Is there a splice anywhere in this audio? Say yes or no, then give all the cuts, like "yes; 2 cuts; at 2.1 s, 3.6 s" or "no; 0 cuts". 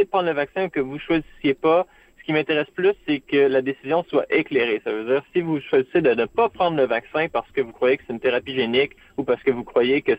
no; 0 cuts